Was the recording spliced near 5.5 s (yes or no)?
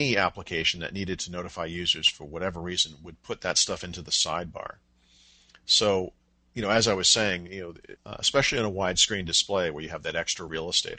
no